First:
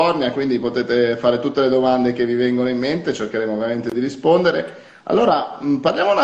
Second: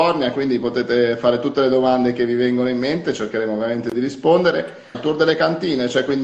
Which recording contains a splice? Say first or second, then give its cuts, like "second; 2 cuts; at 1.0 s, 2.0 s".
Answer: second; 1 cut; at 4.9 s